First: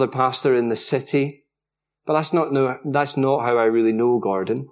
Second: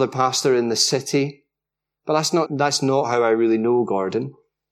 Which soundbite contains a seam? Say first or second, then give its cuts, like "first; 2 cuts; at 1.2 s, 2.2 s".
second; 1 cut; at 2.5 s